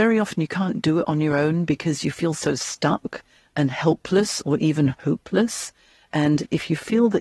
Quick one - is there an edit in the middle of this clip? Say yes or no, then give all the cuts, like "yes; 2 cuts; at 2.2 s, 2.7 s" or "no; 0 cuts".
no; 0 cuts